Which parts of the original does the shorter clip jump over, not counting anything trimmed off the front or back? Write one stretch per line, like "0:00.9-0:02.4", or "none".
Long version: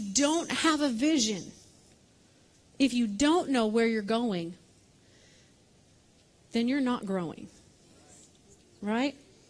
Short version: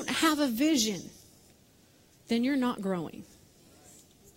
0:02.6-0:06.4